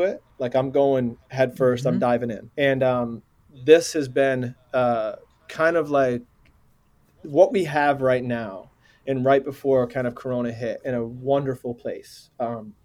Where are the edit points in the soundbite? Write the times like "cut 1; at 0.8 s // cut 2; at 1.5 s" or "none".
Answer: cut 1; at 2.5 s // cut 2; at 10.8 s